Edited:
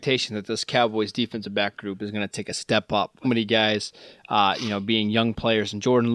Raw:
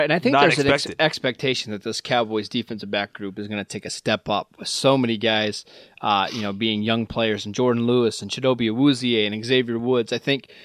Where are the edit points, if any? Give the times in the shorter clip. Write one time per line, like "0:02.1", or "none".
0:03.2